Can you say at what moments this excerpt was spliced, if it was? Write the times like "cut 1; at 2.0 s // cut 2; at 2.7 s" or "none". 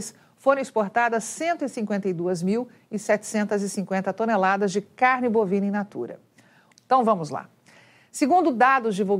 cut 1; at 6.7 s